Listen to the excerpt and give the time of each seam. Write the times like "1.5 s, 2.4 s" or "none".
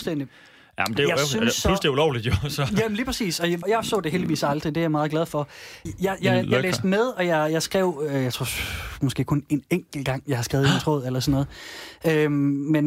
3.6 s, 5.9 s